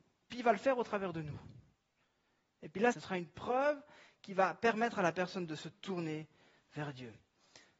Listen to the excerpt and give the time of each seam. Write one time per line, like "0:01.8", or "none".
0:02.9